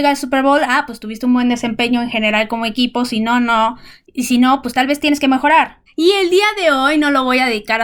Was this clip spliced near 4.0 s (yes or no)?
yes